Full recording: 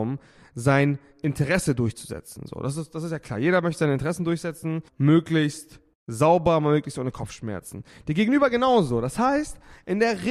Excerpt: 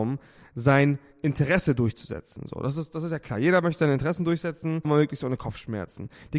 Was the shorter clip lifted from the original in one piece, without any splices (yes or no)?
no